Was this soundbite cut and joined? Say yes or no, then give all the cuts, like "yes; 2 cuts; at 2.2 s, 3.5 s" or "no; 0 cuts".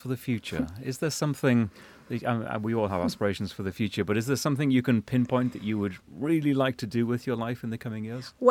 no; 0 cuts